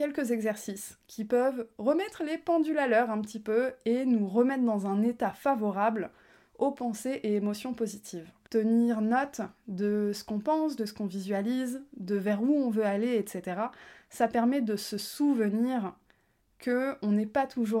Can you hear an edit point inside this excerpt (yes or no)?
yes